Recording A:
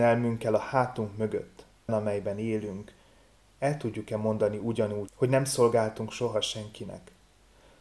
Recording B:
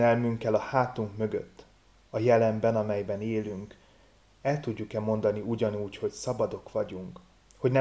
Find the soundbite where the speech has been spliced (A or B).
A